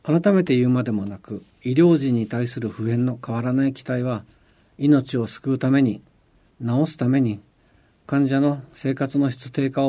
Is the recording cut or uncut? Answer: uncut